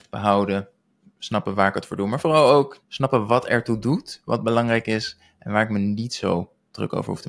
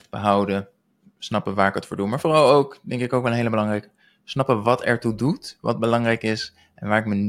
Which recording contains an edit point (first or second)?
first